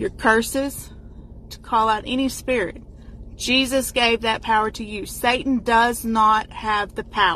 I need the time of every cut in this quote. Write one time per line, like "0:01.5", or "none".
0:01.5